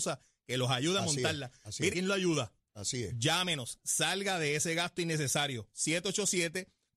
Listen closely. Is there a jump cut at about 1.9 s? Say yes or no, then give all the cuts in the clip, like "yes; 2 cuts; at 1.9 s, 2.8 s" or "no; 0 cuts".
yes; 1 cut; at 1.9 s